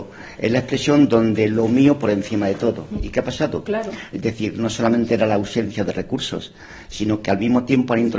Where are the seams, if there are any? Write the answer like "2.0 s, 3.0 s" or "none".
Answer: 3.7 s